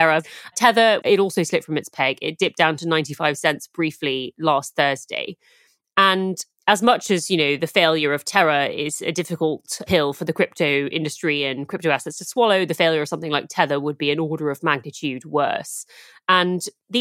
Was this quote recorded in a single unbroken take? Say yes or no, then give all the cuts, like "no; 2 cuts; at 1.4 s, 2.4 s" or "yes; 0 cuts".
no; 1 cut; at 1.0 s